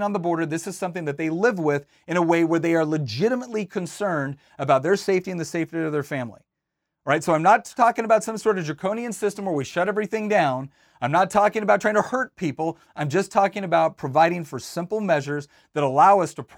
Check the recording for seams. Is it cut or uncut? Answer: uncut